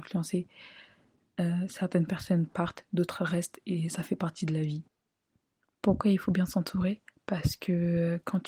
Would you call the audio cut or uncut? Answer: uncut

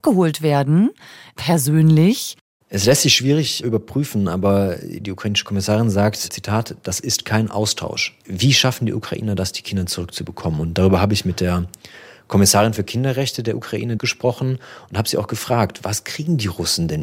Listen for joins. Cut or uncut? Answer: cut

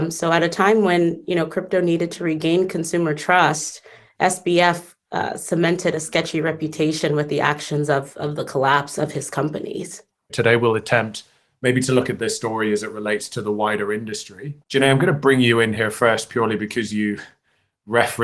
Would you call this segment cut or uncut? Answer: cut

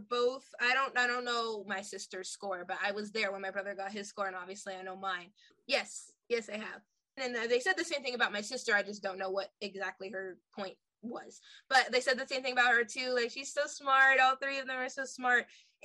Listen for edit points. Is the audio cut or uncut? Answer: cut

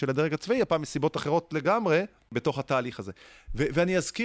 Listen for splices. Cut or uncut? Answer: uncut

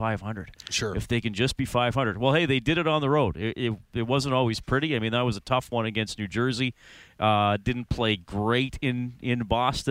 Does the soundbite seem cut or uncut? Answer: uncut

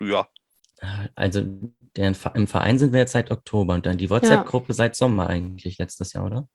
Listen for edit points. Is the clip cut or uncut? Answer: uncut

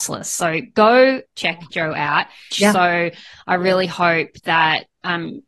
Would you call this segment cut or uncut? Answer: cut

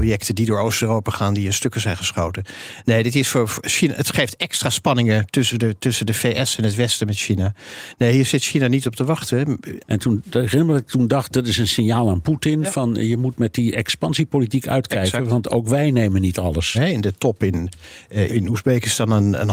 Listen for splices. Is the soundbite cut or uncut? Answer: cut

